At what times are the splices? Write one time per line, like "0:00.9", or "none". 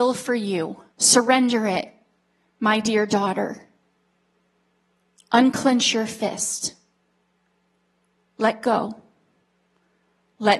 0:00.9